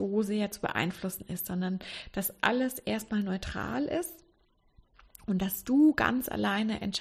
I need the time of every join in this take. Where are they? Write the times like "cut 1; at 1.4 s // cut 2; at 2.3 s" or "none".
none